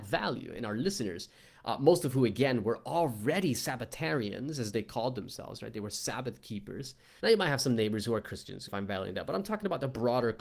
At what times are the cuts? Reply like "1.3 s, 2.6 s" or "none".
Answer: 7.2 s, 8.7 s